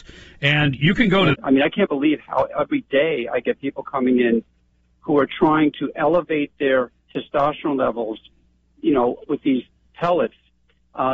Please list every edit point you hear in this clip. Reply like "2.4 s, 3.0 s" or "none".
1.3 s